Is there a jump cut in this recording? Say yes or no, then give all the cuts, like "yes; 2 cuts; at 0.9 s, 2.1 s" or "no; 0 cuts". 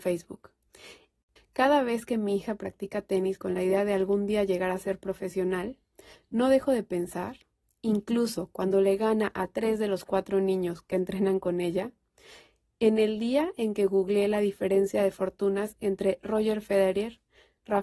yes; 1 cut; at 1.4 s